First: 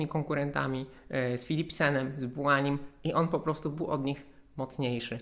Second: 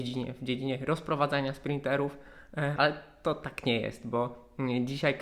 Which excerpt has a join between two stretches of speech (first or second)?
second